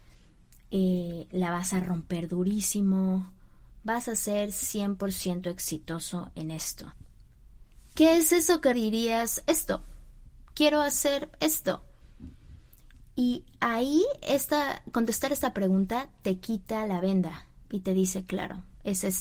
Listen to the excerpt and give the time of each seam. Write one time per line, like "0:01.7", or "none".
0:08.7